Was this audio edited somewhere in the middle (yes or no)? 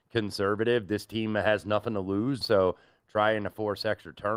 yes